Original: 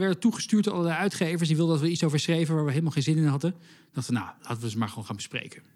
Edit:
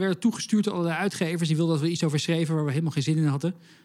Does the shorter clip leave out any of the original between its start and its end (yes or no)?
no